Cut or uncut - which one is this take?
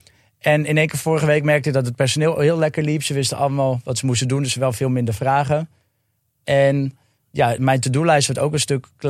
uncut